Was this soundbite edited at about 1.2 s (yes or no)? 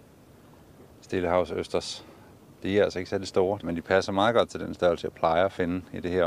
no